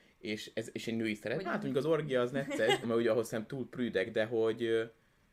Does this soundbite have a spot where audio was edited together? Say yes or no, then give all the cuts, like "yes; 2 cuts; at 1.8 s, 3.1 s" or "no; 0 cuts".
yes; 2 cuts; at 1.4 s, 2.8 s